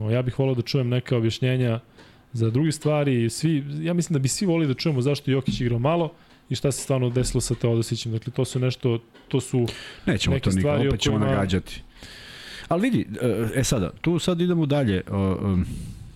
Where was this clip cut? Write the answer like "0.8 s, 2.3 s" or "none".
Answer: none